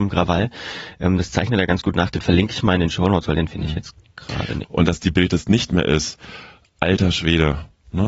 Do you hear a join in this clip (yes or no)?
yes